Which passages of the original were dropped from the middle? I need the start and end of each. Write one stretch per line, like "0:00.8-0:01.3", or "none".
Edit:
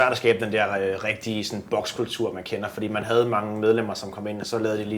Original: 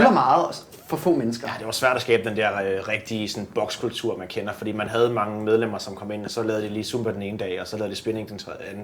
none

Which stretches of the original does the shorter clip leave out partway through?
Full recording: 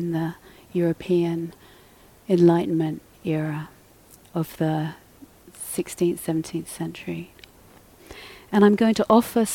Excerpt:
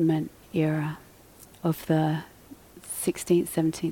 none

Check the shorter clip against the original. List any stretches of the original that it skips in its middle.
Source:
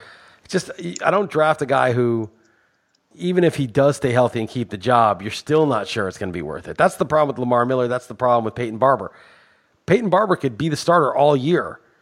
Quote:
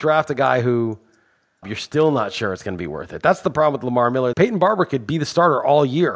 0:02.9-0:05.2
0:07.9-0:09.8

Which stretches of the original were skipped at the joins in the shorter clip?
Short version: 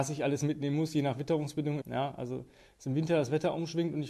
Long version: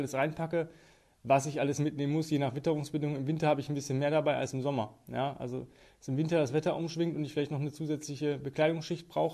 0:03.2-0:05.0

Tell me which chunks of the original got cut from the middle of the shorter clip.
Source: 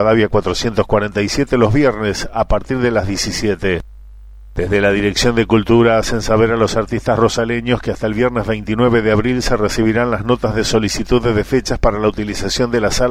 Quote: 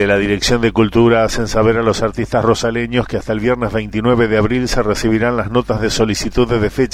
none

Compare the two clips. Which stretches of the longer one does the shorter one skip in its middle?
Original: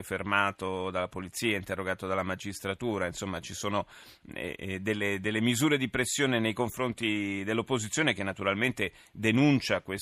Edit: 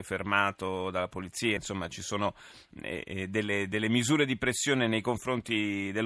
0:01.6-0:03.1

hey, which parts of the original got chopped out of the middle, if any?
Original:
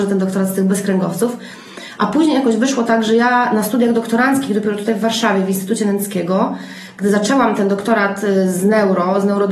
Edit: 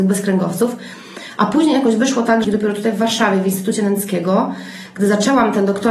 0:03.0-0:04.5

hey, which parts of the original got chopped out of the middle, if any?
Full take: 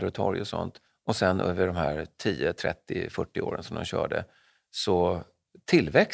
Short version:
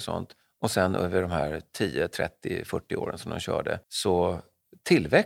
0:04.3-0:04.7

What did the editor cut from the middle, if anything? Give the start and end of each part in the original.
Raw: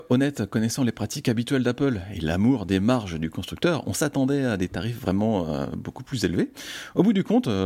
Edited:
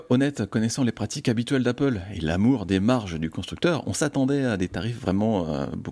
none

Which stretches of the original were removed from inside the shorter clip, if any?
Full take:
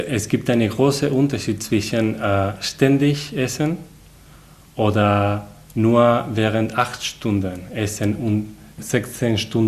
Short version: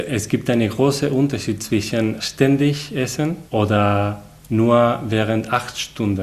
0:02.2-0:02.6
0:03.9-0:04.7

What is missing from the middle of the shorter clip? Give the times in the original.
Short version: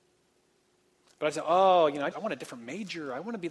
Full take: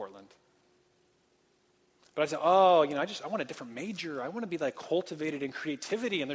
0:03.1-0:03.2

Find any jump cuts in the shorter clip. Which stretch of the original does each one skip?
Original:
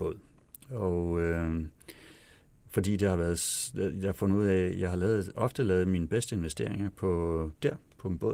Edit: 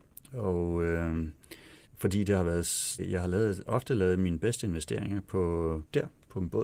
0:02.2-0:02.6
0:03.7-0:04.7

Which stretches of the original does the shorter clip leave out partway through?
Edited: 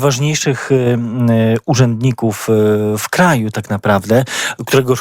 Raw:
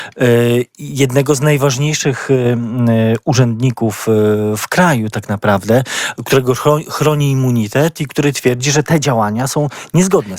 none

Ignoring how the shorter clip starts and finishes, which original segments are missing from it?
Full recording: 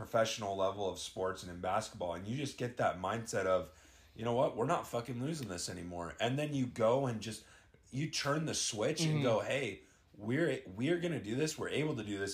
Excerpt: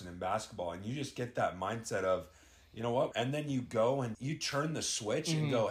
0:04.5-0:06.2
0:07.2-0:07.9

